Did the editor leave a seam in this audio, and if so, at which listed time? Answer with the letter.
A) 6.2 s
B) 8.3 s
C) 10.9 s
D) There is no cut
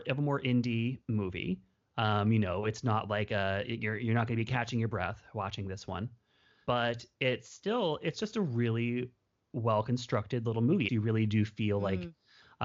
C